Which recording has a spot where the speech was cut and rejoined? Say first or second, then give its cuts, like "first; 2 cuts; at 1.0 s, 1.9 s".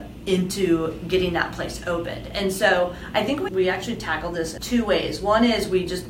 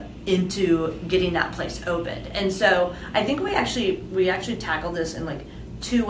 first; 2 cuts; at 3.5 s, 4.6 s